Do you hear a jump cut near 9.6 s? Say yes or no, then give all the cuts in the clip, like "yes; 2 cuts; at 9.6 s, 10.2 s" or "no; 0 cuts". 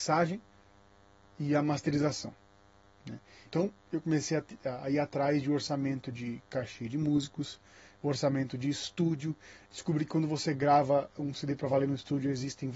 no; 1 cut; at 3.4 s